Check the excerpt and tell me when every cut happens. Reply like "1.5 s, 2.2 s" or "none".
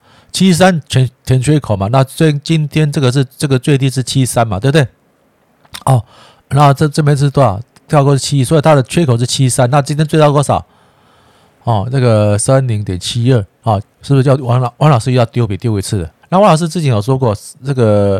13.8 s, 16.2 s

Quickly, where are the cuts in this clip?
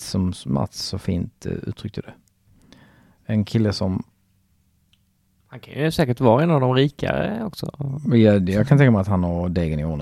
none

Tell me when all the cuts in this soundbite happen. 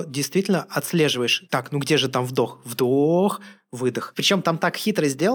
none

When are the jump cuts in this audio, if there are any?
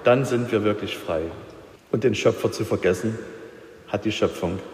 1.8 s

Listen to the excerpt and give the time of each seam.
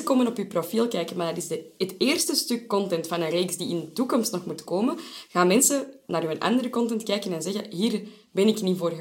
none

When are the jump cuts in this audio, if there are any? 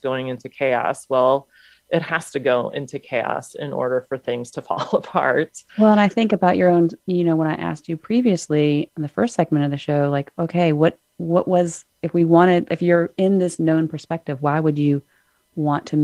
8.9 s, 11.9 s

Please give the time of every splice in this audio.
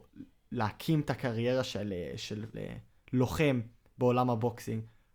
2.5 s

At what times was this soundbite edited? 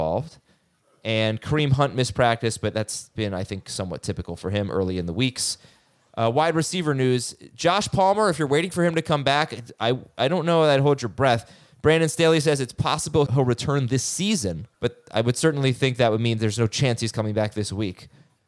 13.3 s, 14.7 s

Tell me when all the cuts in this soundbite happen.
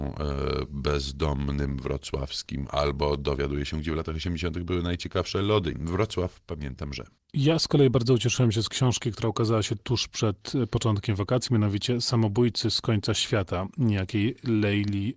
5.7 s

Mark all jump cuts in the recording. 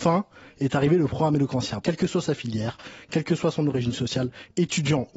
1.8 s

